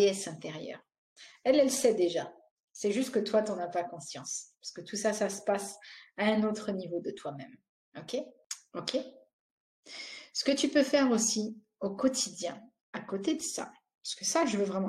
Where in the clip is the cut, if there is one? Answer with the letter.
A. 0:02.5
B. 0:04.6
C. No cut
C